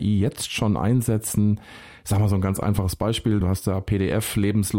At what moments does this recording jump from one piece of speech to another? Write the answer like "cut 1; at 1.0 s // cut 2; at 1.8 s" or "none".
cut 1; at 3.4 s